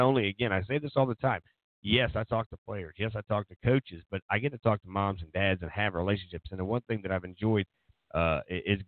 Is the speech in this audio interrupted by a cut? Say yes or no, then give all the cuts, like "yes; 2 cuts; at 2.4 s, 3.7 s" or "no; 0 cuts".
no; 0 cuts